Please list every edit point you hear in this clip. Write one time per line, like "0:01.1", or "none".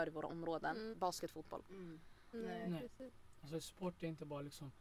0:00.9
0:02.3